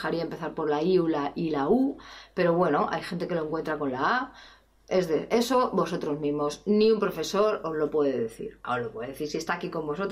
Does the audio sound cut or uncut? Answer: uncut